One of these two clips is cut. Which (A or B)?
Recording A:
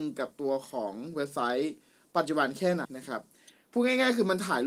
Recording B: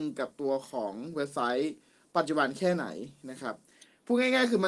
A